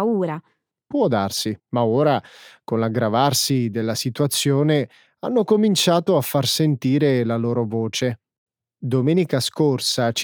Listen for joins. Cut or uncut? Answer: cut